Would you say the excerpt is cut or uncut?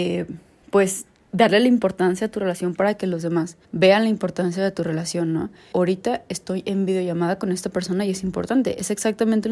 cut